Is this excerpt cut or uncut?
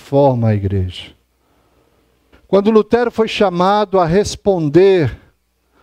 cut